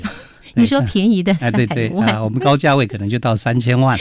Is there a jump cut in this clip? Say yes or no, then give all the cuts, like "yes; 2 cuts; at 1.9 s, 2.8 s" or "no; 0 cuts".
yes; 1 cut; at 1.7 s